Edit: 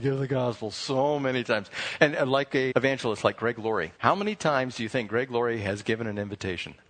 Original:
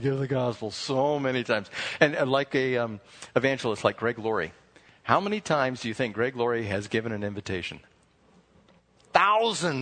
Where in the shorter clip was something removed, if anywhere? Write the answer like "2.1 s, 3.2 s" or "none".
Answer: 2.7 s, 4.0 s

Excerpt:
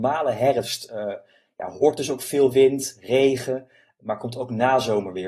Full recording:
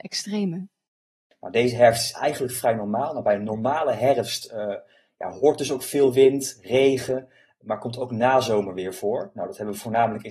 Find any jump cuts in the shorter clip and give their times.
none

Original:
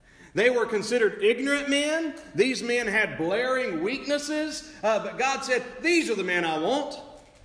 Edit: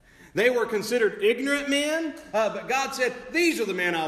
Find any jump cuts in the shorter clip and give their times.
2.3 s

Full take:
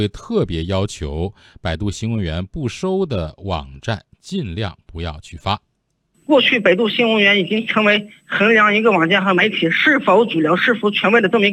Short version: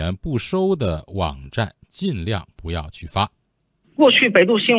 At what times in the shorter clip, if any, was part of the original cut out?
none

